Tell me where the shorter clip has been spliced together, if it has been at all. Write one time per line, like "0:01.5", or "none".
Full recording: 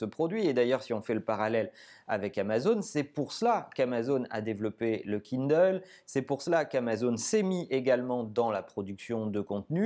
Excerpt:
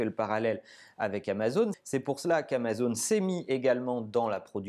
0:01.7